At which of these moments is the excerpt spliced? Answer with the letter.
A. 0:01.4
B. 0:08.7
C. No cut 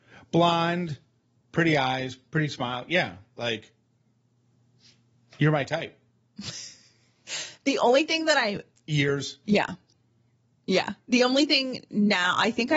A